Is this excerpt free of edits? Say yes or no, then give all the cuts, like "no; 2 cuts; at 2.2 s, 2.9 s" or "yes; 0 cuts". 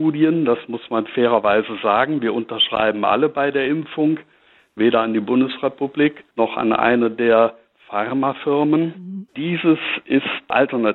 no; 3 cuts; at 4.8 s, 6.3 s, 9.3 s